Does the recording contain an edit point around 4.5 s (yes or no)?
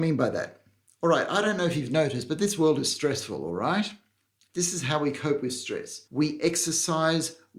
yes